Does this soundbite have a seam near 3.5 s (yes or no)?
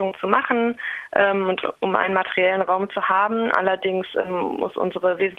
no